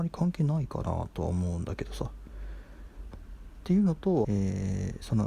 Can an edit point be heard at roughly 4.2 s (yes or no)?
yes